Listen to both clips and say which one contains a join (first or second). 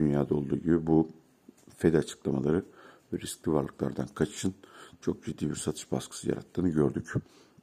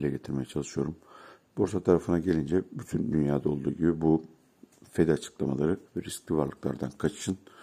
second